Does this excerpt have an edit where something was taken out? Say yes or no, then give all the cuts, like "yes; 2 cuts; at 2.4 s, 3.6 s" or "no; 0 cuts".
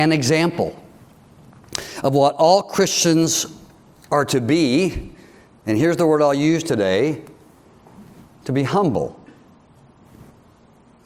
no; 0 cuts